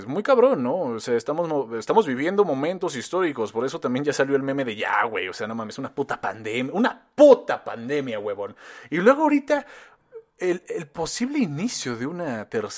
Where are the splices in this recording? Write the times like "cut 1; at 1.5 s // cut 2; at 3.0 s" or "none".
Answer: none